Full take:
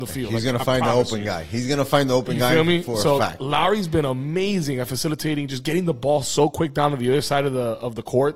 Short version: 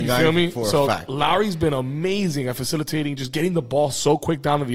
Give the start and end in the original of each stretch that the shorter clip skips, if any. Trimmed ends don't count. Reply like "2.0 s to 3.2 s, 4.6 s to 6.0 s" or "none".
none